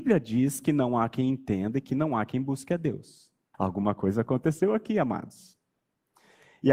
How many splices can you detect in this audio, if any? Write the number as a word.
one